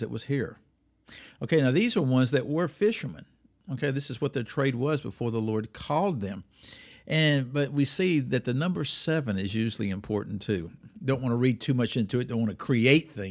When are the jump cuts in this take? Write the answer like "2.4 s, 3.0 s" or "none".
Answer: none